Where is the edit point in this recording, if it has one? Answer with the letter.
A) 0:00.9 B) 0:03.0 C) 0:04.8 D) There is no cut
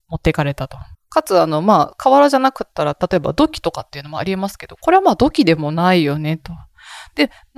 A